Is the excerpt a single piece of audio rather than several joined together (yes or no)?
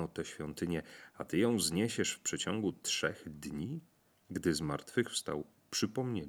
no